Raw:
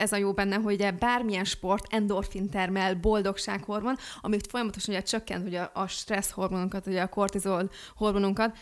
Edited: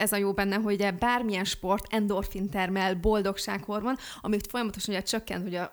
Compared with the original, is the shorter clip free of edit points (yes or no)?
yes